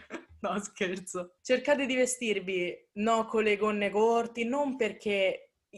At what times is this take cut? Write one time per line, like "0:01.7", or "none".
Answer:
0:04.4